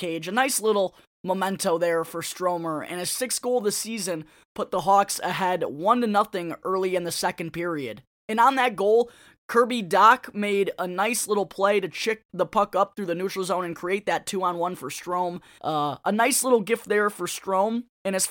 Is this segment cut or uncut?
cut